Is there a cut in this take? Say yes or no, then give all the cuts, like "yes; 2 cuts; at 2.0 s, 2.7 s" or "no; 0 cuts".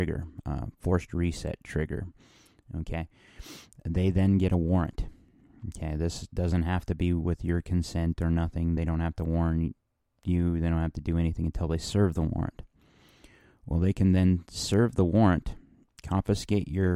no; 0 cuts